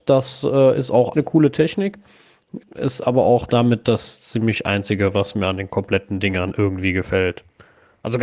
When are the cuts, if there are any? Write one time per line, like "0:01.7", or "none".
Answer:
0:01.1
0:02.6